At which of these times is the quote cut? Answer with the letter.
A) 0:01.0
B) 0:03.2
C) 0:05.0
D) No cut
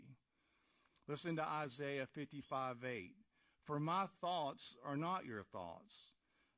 D